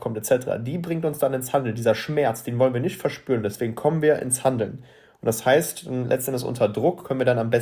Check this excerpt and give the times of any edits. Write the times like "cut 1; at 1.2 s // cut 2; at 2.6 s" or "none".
cut 1; at 3.4 s